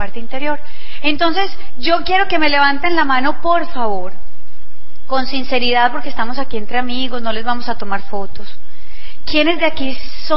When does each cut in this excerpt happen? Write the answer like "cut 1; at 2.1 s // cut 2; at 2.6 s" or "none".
none